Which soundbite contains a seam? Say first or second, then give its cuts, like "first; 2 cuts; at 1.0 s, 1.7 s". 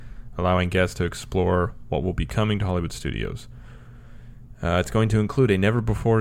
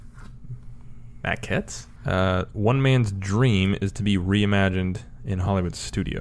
second; 1 cut; at 2.0 s